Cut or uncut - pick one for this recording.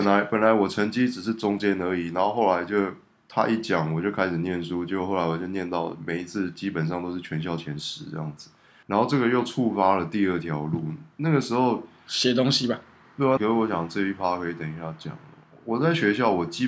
cut